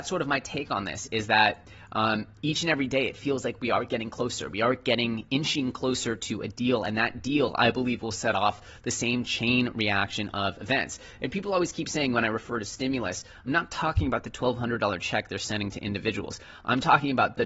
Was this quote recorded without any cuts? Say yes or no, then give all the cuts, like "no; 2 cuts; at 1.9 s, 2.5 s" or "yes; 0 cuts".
yes; 0 cuts